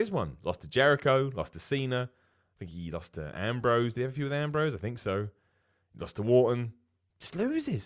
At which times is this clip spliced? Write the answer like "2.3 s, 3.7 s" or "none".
none